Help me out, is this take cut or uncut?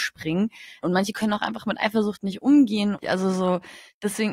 cut